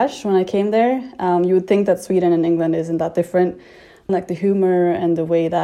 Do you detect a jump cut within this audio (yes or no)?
yes